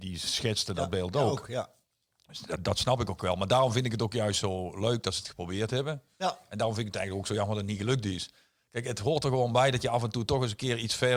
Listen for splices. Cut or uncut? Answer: uncut